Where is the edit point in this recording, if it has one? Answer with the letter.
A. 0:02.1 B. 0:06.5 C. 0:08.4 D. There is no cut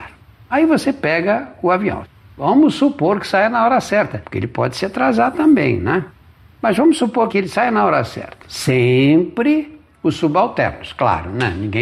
C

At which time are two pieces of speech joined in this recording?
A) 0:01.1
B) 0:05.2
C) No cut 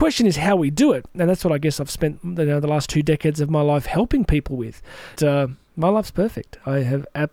B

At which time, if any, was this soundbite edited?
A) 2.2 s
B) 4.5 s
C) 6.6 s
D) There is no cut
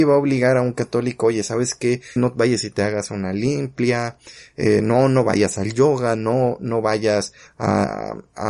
A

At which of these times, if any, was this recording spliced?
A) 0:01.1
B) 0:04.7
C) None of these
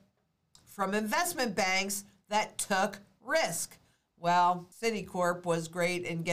B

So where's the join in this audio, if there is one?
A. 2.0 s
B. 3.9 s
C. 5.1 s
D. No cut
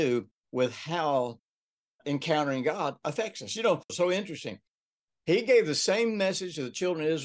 B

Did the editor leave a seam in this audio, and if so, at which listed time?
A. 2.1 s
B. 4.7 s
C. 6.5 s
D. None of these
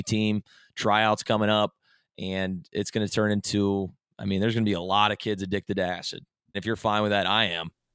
C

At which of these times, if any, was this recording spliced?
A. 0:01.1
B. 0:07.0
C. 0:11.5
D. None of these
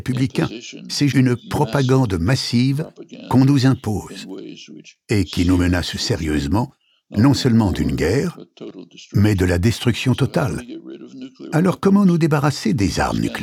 A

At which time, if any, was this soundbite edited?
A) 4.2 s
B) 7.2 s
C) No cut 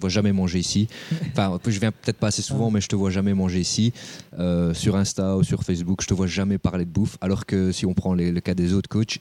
C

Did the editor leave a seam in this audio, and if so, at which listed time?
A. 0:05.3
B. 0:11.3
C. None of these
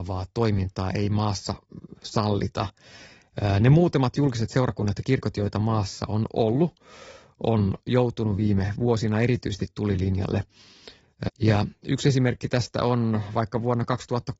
B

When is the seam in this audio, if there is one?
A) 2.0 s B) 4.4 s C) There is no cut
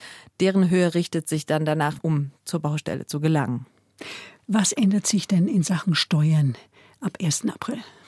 A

